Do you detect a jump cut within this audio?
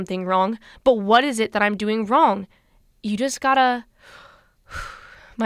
no; 0 cuts

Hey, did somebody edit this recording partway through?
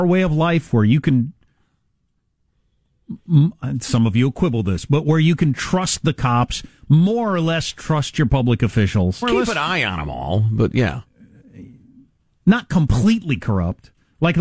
yes; 1 cut; at 9.2 s

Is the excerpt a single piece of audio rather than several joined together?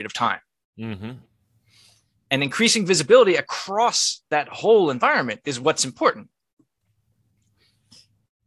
yes; 0 cuts

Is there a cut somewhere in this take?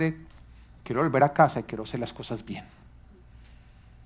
no; 0 cuts

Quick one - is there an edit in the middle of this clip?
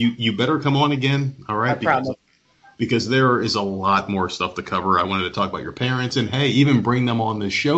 no; 0 cuts

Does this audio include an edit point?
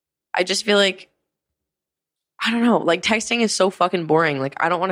no; 0 cuts

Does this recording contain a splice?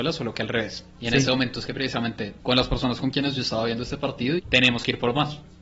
yes; 2 cuts; at 2.4 s, 4.4 s

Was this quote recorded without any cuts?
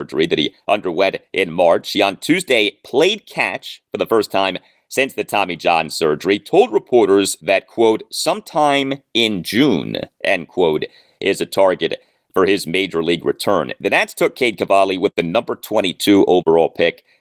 yes; 0 cuts

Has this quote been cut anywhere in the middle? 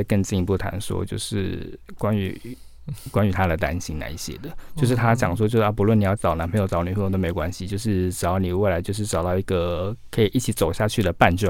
yes; 1 cut; at 6.2 s

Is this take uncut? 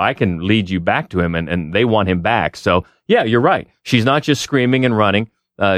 yes; 0 cuts

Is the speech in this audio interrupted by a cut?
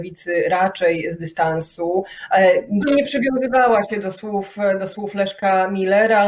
yes; 1 cut; at 2.8 s

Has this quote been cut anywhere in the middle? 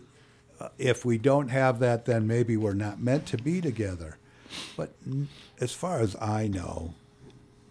no; 0 cuts

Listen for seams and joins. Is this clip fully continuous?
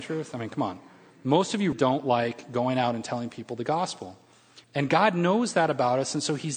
no; 2 cuts; at 1.7 s, 4.6 s

